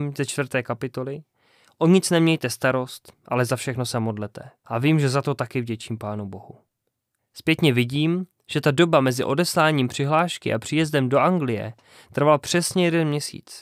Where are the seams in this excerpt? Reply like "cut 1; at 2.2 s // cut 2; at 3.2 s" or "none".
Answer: cut 1; at 4.6 s // cut 2; at 7.2 s